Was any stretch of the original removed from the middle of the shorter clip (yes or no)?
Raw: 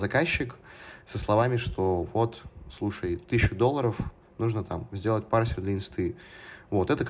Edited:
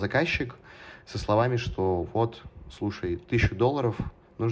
no